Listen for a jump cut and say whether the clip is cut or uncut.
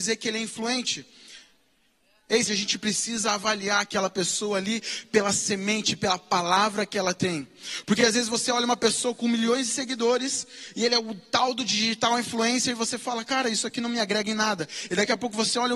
cut